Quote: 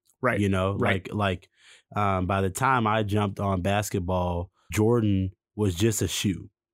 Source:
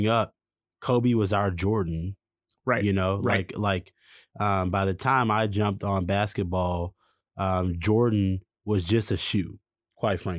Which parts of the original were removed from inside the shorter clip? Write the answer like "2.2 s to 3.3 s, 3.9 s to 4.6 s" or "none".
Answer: 7.1 s to 7.8 s